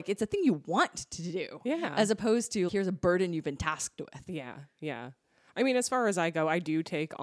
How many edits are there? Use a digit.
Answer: 1